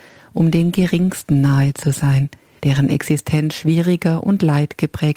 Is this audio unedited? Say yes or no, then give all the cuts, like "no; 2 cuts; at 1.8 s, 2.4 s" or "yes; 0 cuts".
no; 1 cut; at 2.6 s